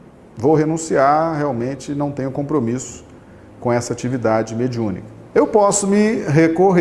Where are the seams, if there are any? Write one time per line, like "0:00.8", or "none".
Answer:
none